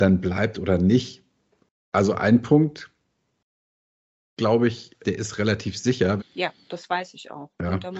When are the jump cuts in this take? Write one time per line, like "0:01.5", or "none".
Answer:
0:05.0
0:06.2